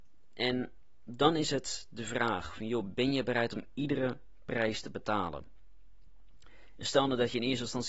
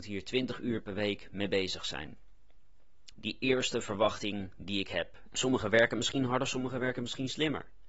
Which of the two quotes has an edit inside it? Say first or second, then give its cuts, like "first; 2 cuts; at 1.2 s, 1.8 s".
second; 2 cuts; at 3.1 s, 5.3 s